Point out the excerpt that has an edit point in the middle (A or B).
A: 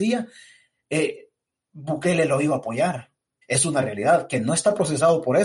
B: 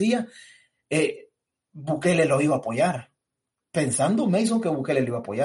A